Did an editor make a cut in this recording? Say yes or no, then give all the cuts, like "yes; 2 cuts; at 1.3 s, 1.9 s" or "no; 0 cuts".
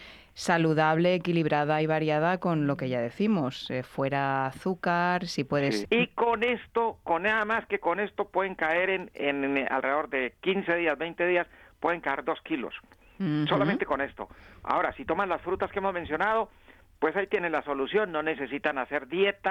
yes; 1 cut; at 5.8 s